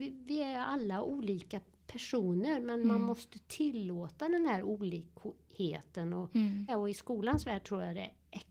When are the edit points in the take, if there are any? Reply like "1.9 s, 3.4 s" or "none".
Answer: 6.7 s